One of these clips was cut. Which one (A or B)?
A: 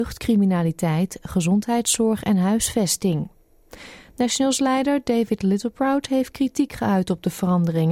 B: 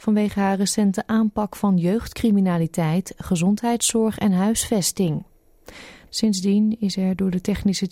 B